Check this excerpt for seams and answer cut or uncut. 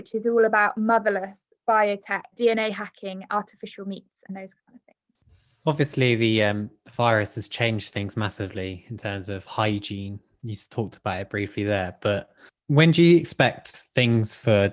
cut